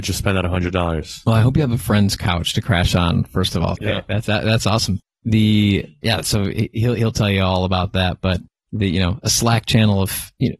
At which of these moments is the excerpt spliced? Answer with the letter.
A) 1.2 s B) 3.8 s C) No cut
B